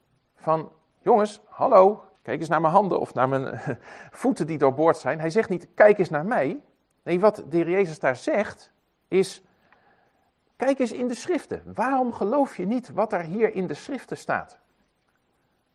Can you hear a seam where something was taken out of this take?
yes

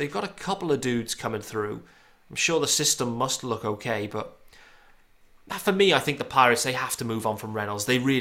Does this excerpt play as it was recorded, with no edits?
yes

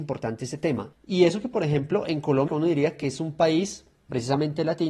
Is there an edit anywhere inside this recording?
yes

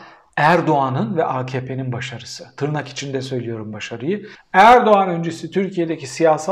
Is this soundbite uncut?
no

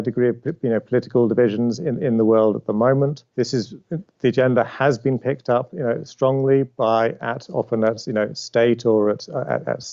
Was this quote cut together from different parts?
yes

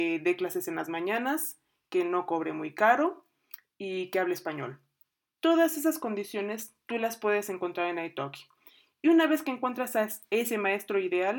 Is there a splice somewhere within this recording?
no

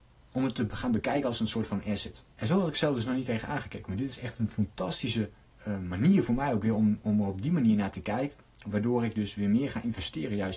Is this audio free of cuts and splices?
no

